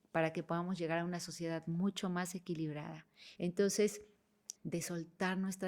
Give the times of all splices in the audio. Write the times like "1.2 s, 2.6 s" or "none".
3.4 s, 4.6 s